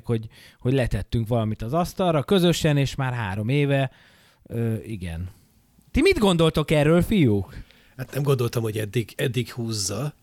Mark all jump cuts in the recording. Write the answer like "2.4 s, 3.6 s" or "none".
none